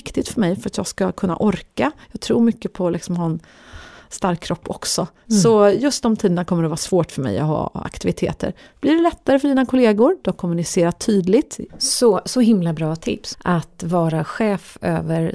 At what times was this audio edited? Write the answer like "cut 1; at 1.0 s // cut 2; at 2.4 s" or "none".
cut 1; at 11.7 s // cut 2; at 13.3 s